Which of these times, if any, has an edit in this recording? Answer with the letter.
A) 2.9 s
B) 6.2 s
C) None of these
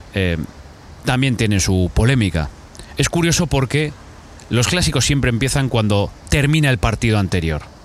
C